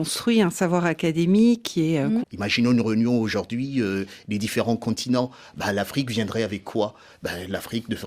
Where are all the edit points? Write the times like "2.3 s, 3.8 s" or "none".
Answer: 2.2 s